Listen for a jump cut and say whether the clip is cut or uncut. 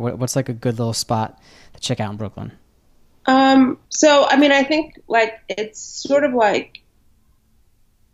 cut